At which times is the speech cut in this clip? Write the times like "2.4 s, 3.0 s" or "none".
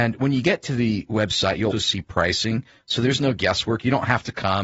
1.7 s